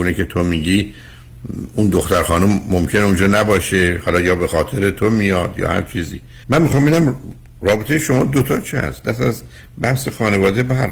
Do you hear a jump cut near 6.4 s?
yes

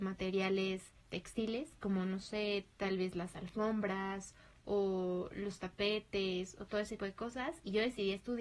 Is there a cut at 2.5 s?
no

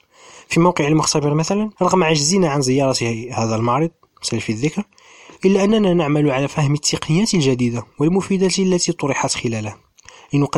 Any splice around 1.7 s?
yes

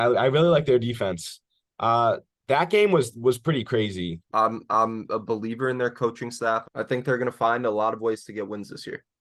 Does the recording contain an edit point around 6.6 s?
yes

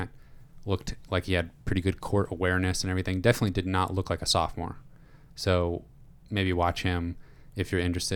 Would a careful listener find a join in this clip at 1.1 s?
no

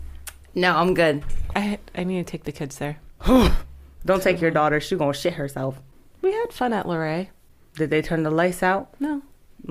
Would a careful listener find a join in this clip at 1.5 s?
yes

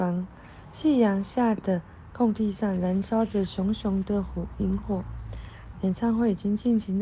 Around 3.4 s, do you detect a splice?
no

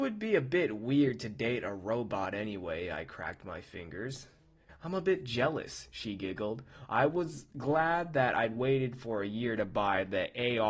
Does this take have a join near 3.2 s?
no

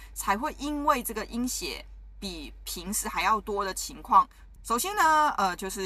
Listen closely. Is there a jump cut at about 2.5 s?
no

